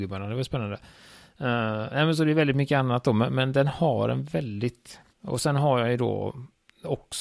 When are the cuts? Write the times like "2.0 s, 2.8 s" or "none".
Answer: 5.1 s